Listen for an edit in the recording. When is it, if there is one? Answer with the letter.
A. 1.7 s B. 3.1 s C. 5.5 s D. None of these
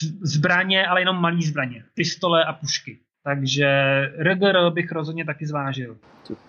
B